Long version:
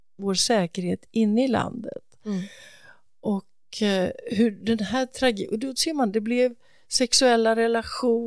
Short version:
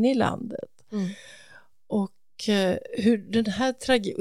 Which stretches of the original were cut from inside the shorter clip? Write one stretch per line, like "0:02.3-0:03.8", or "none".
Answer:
none

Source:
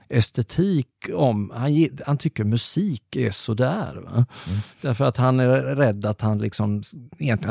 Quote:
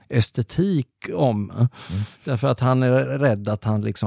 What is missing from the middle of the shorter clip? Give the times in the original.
0:01.5-0:04.1

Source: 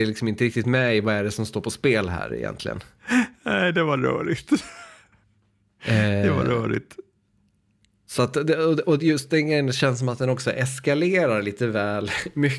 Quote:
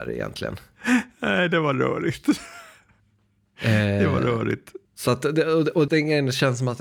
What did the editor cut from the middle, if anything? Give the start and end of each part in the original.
0:07.1-0:08.0
0:09.0-0:09.3

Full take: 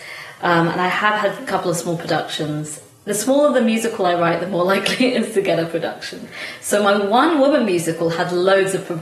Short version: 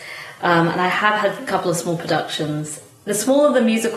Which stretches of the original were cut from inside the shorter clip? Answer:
none

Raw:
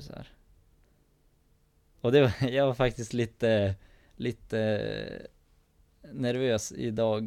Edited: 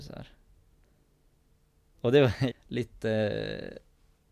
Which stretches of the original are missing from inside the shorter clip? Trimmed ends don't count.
0:02.5-0:04.0

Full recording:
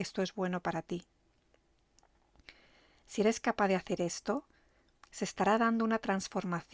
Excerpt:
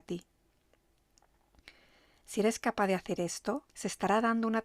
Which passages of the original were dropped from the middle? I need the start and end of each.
0:04.5-0:05.1

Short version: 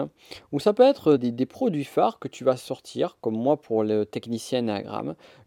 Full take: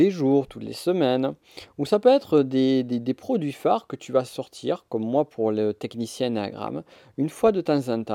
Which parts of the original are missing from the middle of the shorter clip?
0:02.4-0:02.8

